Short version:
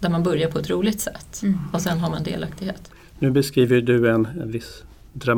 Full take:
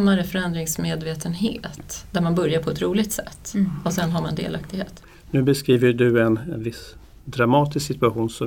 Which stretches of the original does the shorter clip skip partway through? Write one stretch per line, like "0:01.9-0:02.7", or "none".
none